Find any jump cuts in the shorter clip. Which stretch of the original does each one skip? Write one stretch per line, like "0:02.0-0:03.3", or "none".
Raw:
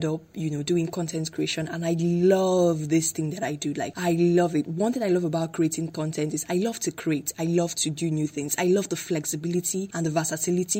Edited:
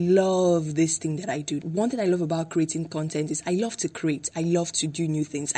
0:03.7-0:04.6